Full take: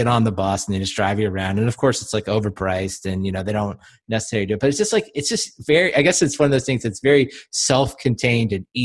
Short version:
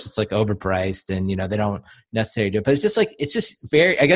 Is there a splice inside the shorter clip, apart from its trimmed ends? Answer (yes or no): no